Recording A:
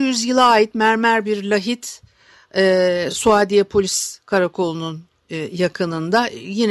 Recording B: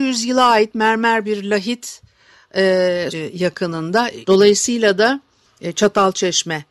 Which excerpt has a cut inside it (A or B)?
B